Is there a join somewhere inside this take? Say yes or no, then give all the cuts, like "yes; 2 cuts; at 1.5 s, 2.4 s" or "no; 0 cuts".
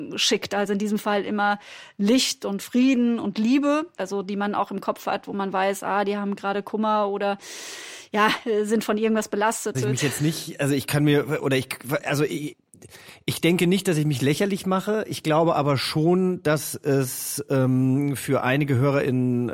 yes; 2 cuts; at 4.0 s, 9.7 s